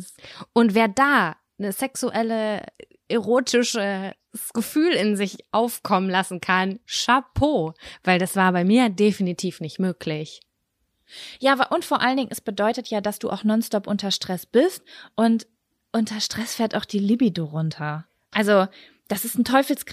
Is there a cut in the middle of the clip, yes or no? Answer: yes